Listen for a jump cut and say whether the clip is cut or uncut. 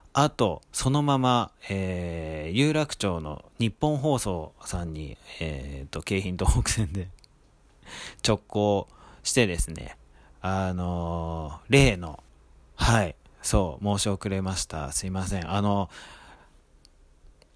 uncut